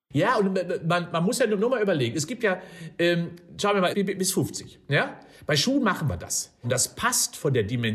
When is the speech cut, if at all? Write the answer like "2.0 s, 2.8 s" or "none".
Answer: 3.9 s, 6.6 s